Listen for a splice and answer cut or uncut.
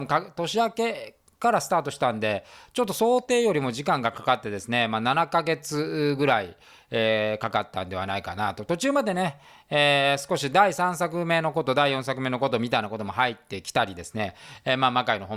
uncut